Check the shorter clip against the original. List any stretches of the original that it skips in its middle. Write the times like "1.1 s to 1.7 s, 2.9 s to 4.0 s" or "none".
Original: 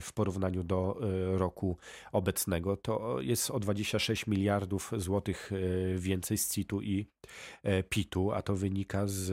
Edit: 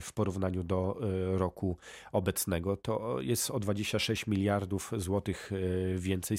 none